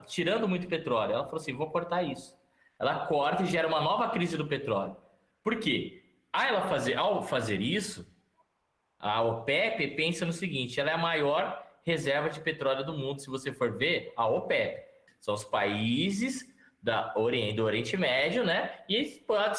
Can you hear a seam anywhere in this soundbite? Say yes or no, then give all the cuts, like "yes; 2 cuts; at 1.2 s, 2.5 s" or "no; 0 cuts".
yes; 1 cut; at 15.1 s